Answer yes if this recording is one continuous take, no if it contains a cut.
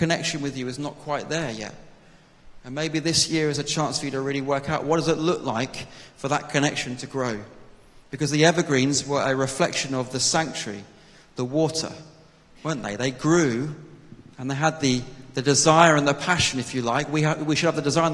yes